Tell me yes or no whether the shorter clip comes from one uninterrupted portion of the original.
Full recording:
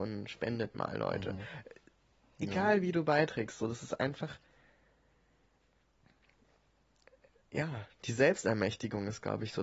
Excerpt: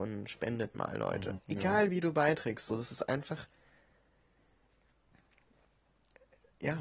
no